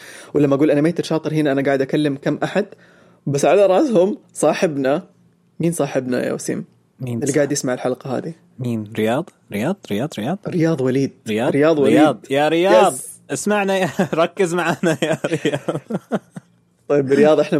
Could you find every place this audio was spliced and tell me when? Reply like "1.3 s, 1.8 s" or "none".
none